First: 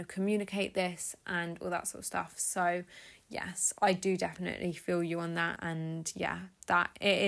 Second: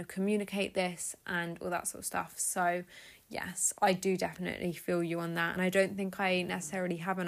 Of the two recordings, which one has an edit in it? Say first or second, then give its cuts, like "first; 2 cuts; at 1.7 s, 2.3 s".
first; 1 cut; at 5.6 s